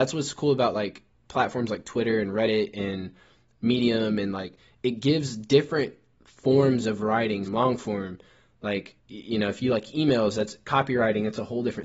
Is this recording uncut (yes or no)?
no